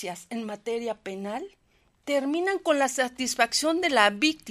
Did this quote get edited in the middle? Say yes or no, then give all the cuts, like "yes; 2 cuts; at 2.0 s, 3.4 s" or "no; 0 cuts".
no; 0 cuts